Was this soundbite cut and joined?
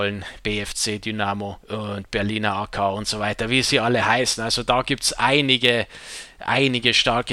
yes; 1 cut; at 1.6 s

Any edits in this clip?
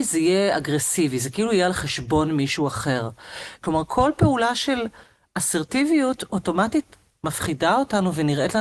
yes; 1 cut; at 3.6 s

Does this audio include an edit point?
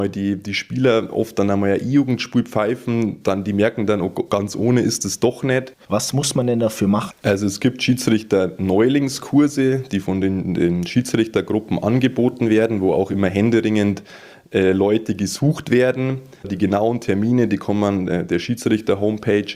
yes; 2 cuts; at 5.8 s, 7.1 s

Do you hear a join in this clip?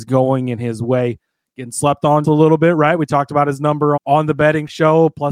yes; 2 cuts; at 2.2 s, 4.0 s

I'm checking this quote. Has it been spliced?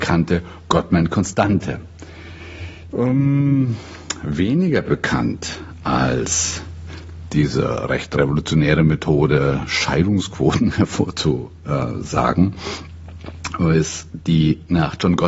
yes; 1 cut; at 2.9 s

